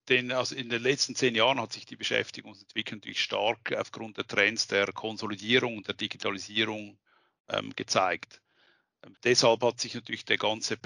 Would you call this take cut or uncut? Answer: cut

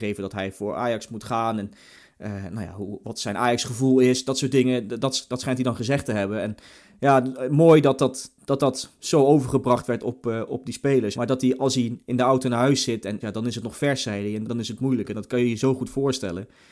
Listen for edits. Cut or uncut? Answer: cut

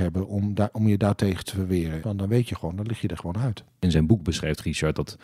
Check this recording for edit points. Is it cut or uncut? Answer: cut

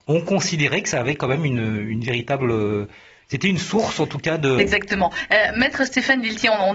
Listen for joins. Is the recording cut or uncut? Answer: cut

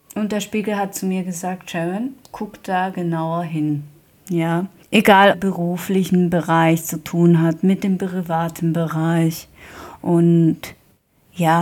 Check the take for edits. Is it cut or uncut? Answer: cut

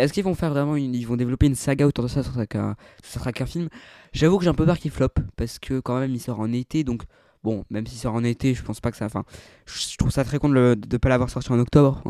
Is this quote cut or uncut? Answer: uncut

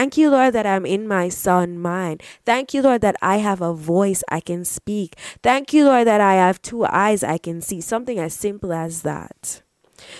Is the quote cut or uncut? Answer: uncut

